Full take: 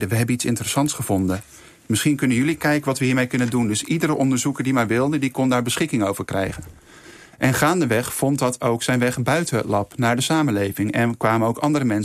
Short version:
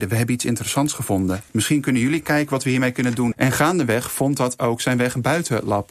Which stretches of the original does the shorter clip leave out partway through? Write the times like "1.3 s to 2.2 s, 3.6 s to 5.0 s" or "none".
1.5 s to 1.8 s, 3.7 s to 7.3 s